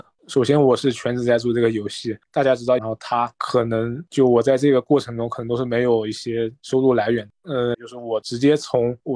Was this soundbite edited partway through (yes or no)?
yes